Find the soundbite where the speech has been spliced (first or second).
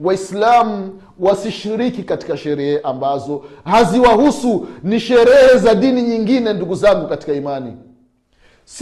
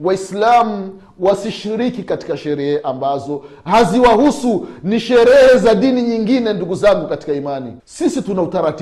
second